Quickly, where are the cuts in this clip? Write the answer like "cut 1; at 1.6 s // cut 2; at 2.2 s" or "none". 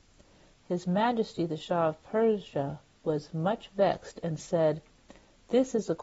none